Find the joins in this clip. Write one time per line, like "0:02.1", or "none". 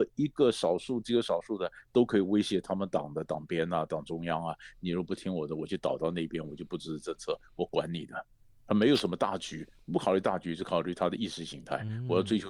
none